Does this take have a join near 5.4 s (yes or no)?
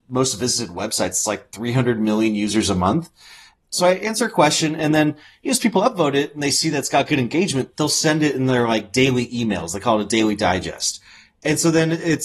no